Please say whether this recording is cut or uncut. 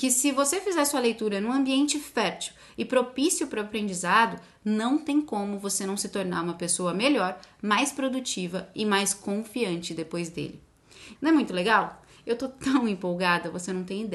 cut